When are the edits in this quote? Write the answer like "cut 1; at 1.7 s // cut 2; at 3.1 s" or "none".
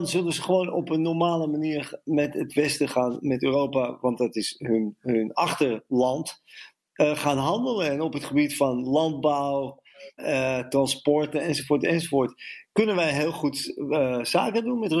cut 1; at 10.2 s